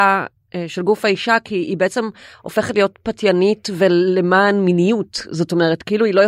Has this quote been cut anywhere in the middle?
no; 0 cuts

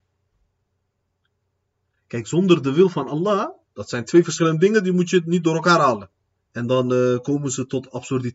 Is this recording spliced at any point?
yes; 2 cuts; at 3.6 s, 6.3 s

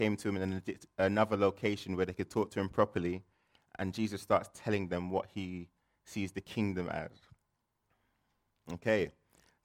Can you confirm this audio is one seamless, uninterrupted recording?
yes; 0 cuts

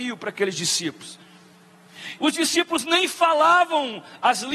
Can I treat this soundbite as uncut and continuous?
no; 1 cut; at 2.2 s

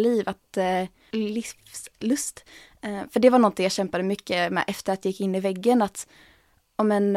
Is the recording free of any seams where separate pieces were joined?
no; 1 cut; at 1.1 s

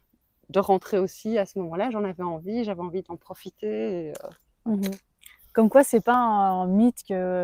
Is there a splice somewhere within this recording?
no; 0 cuts

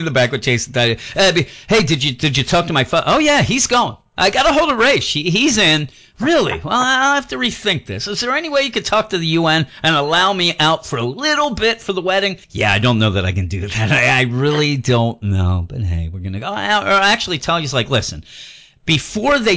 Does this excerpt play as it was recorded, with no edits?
no; 1 cut; at 12.4 s

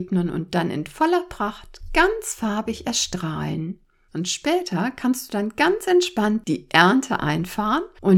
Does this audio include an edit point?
yes; 1 cut; at 4.1 s

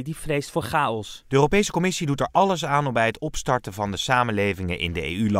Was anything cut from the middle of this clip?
no; 0 cuts

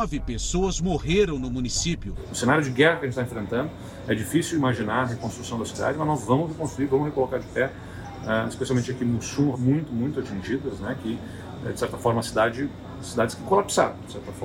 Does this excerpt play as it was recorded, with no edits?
no; 1 cut; at 9.5 s

